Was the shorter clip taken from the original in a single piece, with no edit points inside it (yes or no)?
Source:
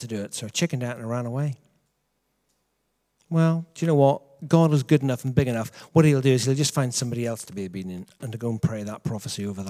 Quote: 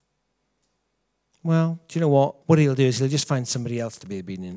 no